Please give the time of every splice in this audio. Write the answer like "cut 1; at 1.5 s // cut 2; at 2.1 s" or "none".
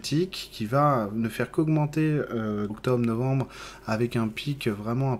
cut 1; at 2.7 s